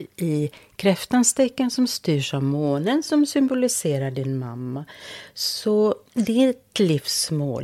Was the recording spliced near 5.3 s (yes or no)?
no